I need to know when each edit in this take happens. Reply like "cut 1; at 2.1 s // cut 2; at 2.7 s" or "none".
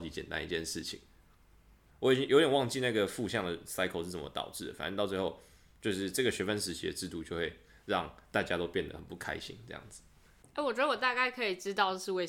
cut 1; at 1.9 s